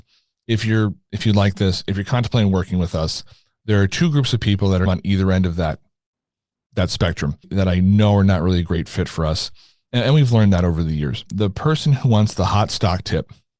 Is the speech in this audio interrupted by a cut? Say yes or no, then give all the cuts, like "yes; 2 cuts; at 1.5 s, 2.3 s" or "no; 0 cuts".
no; 0 cuts